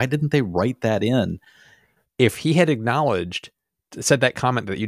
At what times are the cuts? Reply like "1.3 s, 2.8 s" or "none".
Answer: 2.0 s